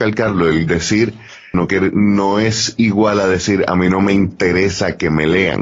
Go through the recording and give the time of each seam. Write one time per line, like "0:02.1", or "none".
0:01.5